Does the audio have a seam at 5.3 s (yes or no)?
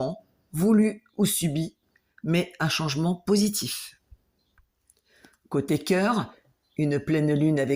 no